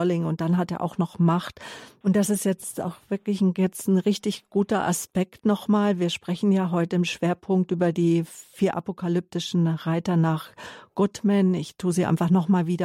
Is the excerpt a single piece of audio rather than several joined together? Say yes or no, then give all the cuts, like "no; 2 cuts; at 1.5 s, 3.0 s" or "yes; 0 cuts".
no; 1 cut; at 2.0 s